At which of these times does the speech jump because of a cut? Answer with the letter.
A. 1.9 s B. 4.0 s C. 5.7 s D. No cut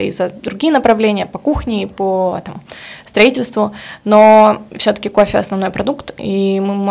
D